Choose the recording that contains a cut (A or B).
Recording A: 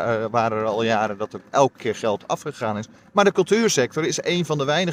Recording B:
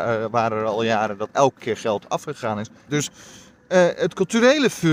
B